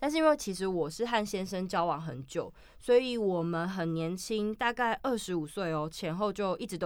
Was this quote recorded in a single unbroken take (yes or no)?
yes